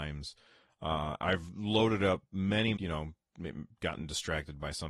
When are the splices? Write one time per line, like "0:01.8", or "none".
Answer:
0:02.7